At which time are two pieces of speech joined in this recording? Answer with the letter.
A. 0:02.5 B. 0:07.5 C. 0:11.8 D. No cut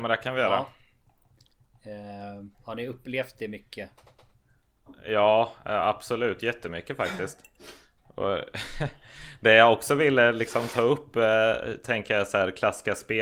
A